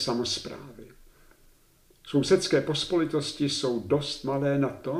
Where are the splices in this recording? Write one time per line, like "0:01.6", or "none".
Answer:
none